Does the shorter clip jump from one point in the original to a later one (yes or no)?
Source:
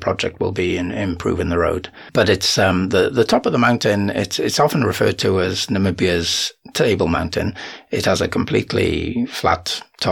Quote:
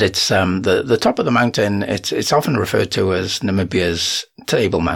no